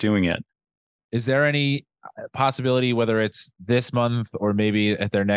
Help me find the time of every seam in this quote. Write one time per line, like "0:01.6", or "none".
0:01.0